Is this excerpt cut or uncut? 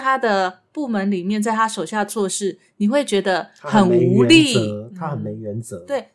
uncut